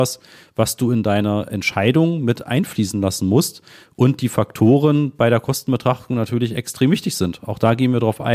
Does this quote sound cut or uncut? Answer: uncut